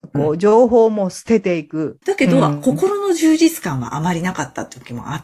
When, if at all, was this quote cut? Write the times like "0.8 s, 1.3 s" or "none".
2.0 s